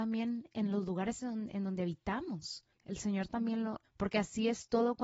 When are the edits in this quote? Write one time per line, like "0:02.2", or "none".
0:02.8
0:03.8